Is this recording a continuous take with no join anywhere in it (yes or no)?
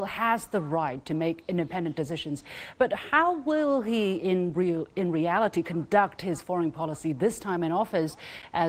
yes